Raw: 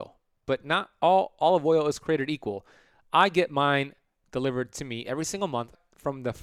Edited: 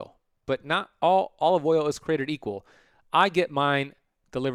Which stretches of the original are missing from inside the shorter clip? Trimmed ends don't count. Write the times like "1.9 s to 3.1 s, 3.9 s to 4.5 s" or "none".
none